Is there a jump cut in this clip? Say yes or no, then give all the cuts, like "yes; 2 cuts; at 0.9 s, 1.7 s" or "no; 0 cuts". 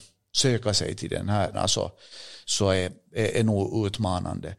yes; 1 cut; at 1.5 s